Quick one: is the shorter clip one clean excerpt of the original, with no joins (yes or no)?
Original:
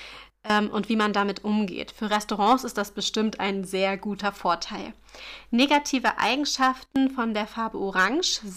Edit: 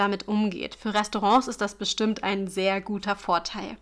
yes